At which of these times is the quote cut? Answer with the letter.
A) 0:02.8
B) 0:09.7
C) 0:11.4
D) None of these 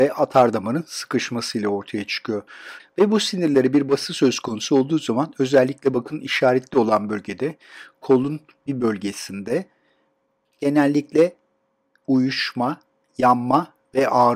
A